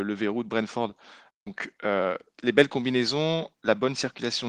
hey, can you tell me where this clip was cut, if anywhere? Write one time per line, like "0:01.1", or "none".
none